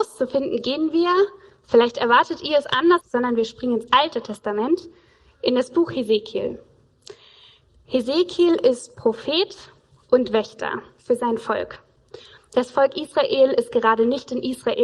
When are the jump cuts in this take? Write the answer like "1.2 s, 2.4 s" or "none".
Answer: 3.0 s, 12.4 s